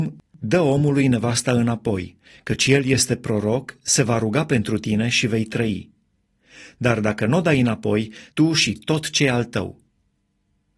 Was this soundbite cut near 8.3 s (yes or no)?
yes